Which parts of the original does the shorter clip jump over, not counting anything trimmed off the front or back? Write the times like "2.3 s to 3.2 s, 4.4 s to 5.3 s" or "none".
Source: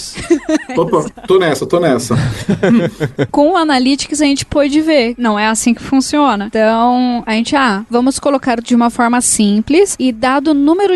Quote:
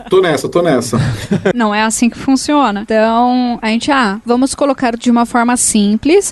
2.7 s to 5.2 s